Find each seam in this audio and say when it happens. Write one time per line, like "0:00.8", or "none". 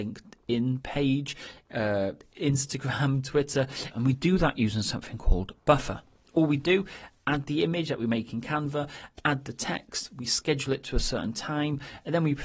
0:03.9